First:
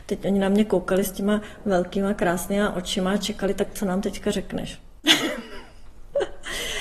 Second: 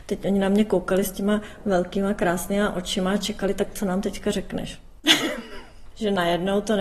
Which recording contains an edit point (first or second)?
second